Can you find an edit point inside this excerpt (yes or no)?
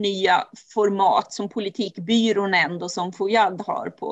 no